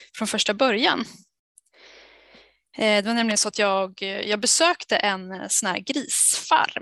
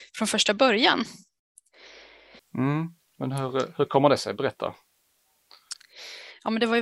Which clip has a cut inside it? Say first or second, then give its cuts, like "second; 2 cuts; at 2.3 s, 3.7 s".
second; 1 cut; at 2.4 s